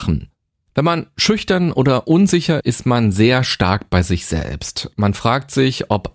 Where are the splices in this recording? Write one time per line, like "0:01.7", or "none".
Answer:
0:02.6